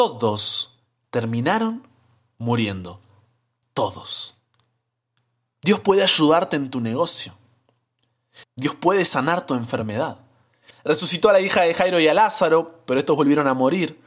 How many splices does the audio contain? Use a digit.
2